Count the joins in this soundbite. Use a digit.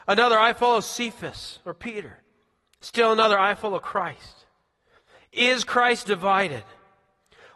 0